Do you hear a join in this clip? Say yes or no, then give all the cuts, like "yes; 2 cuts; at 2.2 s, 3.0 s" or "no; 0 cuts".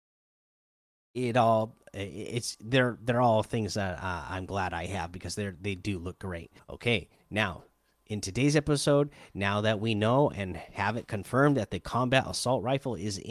yes; 1 cut; at 6.6 s